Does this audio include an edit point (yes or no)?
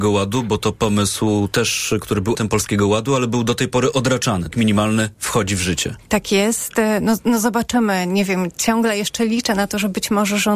yes